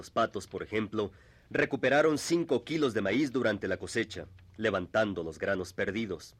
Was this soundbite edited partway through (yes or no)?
no